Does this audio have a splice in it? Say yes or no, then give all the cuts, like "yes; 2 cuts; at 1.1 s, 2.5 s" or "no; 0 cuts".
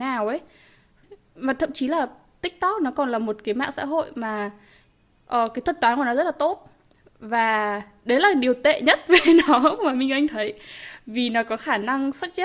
no; 0 cuts